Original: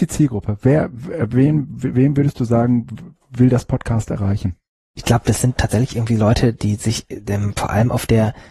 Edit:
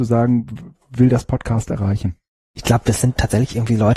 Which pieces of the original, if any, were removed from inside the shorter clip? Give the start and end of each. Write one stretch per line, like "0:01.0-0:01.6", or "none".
none